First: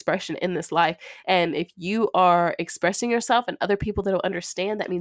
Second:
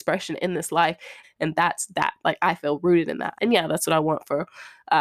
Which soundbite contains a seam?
second; 2 cuts; at 1.2 s, 3.3 s

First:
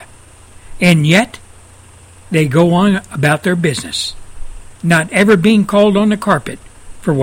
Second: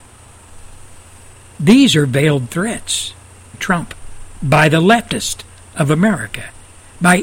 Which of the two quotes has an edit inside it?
second; 1 cut; at 3.5 s

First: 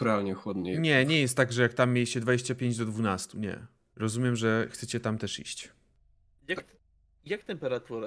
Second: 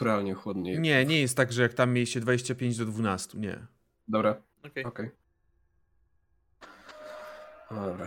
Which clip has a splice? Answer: first; 1 cut; at 3.9 s

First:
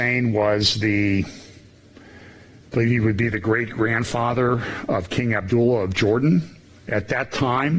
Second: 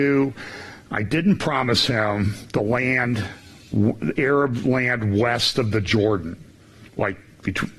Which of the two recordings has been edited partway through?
second; 1 cut; at 6.9 s

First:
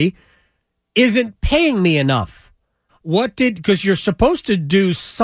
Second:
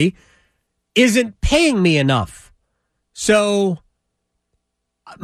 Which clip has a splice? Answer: first; 1 cut; at 2.9 s

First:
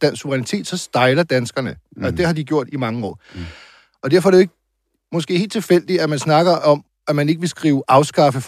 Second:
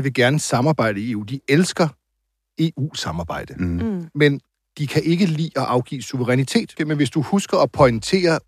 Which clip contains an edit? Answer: second; 1 cut; at 6.8 s

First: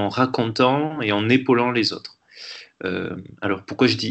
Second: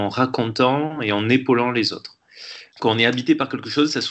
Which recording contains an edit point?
second; 1 cut; at 2.7 s

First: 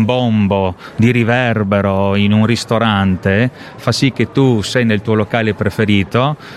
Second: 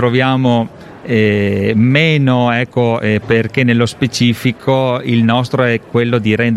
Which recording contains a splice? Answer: second; 1 cut; at 3.2 s

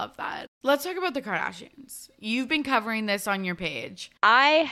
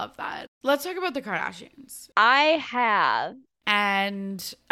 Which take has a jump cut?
second; 2 cuts; at 2.1 s, 3.6 s

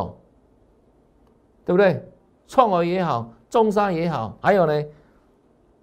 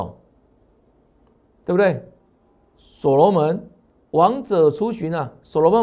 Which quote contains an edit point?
first; 1 cut; at 2.4 s

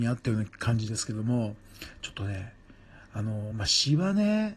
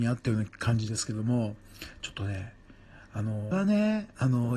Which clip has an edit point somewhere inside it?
second; 1 cut; at 3.5 s

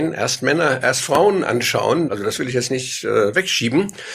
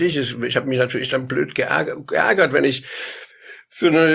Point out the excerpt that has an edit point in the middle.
first; 1 cut; at 2.1 s

